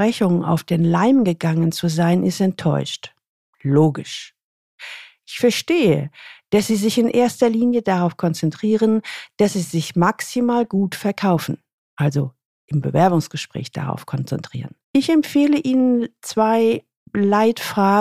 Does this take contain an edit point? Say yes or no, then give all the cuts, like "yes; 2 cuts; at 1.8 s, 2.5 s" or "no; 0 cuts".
yes; 1 cut; at 14.8 s